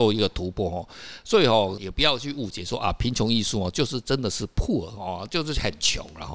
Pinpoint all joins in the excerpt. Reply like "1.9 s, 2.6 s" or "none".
1.8 s

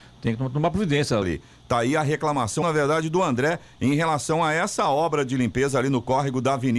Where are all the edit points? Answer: 1.2 s, 2.6 s

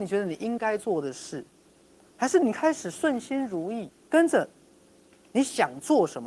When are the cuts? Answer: 4.0 s

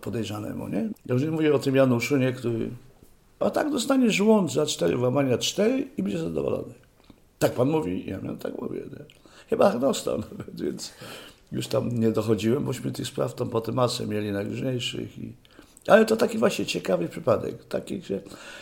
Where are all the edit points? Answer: 0.9 s, 3.4 s

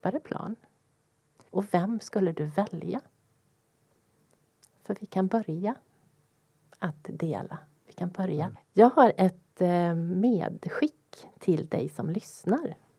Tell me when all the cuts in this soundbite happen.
1.5 s, 8.6 s

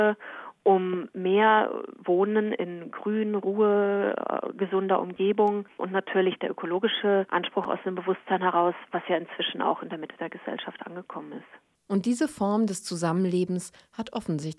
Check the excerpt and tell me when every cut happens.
none

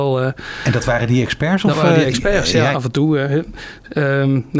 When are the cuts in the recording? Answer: 2.7 s

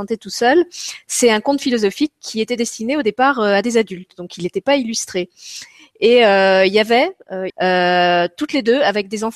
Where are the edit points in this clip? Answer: 7.5 s

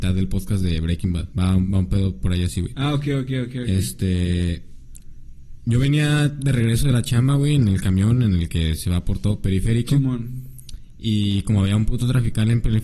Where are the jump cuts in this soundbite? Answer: 1.3 s

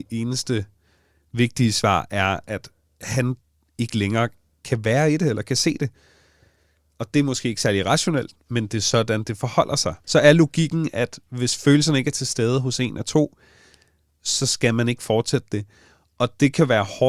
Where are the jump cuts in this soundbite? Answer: 10.0 s

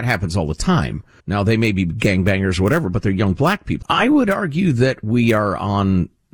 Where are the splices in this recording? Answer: 1.2 s, 3.8 s

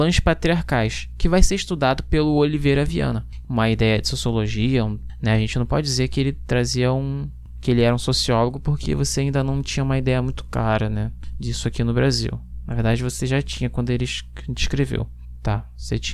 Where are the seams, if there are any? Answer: 3.4 s

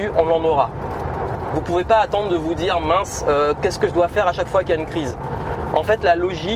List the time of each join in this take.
none

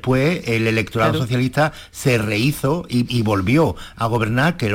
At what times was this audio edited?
3.1 s

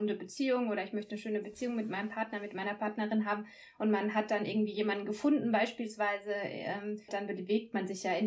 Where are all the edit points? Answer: 7.1 s

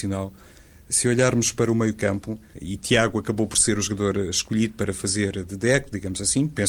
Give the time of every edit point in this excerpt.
2.5 s

